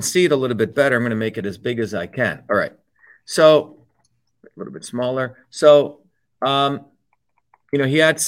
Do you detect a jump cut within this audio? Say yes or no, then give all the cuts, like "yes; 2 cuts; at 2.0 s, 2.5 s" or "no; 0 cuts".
no; 0 cuts